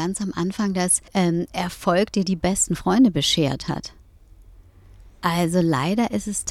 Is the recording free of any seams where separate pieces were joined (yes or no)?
no